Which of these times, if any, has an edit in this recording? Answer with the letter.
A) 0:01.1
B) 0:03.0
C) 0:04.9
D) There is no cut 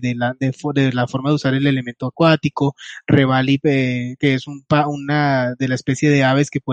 D